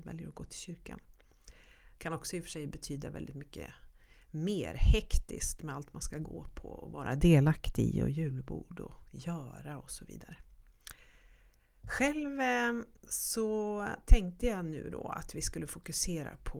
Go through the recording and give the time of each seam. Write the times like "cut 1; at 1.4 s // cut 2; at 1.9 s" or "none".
cut 1; at 1.9 s

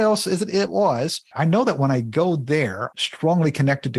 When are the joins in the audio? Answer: cut 1; at 1.3 s // cut 2; at 2.9 s

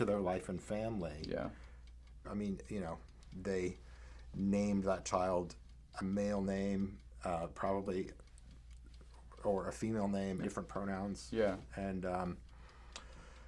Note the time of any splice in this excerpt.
cut 1; at 2.2 s // cut 2; at 10.4 s

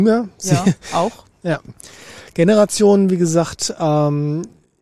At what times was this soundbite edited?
cut 1; at 1.3 s

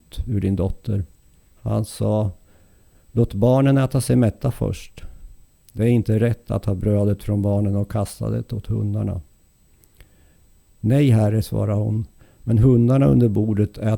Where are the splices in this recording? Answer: cut 1; at 1.5 s

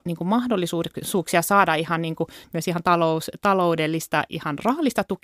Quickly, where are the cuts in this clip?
none

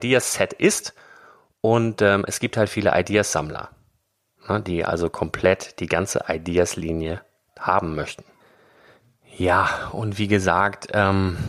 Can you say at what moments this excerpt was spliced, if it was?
none

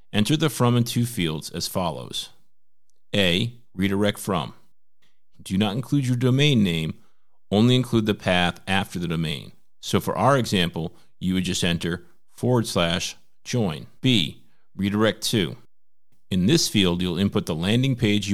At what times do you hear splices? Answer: cut 1; at 5.3 s // cut 2; at 14.0 s

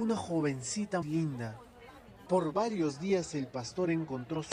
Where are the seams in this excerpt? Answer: cut 1; at 1.0 s // cut 2; at 2.3 s

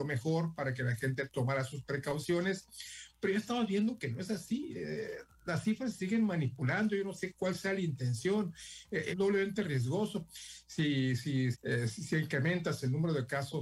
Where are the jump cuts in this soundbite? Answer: cut 1; at 9.1 s // cut 2; at 10.3 s // cut 3; at 11.5 s

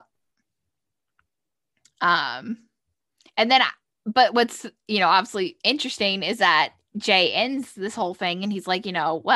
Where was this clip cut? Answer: none

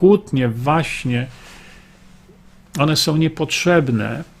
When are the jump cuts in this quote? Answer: none

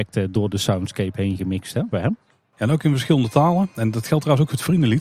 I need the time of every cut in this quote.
cut 1; at 1.9 s

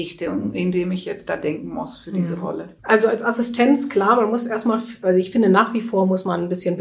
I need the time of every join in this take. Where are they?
cut 1; at 2.8 s

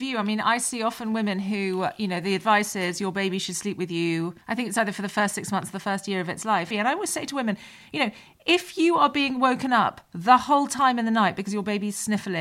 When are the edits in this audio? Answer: cut 1; at 4.4 s // cut 2; at 6.7 s

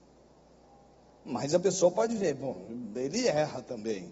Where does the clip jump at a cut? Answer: none

